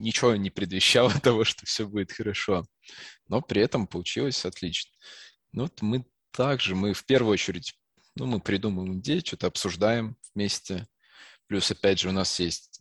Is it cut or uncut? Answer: uncut